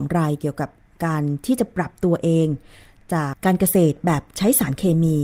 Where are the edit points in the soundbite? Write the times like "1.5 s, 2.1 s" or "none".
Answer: 3.3 s